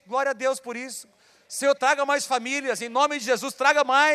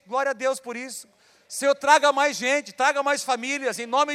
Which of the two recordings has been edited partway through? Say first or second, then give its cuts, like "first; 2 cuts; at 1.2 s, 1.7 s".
first; 1 cut; at 1.8 s